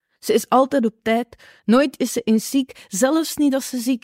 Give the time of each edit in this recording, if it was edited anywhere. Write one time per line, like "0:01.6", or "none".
0:01.6